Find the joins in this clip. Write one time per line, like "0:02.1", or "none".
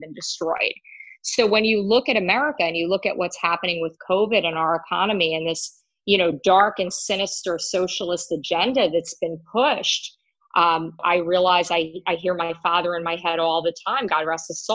0:11.0